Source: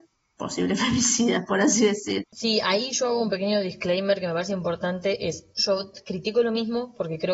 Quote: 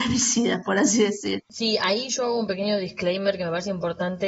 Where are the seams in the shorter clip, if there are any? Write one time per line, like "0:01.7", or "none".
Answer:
none